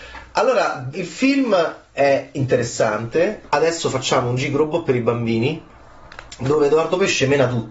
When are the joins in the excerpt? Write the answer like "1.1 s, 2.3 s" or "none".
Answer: 0.9 s, 3.5 s